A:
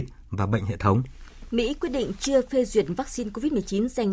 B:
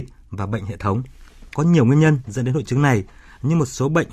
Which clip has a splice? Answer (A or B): B